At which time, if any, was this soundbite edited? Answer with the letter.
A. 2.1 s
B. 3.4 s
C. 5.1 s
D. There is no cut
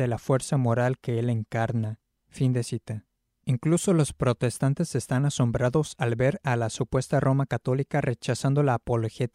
D